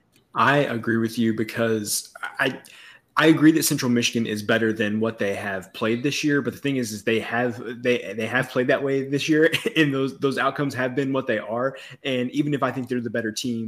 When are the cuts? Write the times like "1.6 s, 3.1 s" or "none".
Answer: none